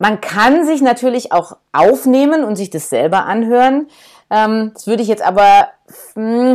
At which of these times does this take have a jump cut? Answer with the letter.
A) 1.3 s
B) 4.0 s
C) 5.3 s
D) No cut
D